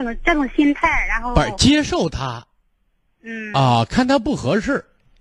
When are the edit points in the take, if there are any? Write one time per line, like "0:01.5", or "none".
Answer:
none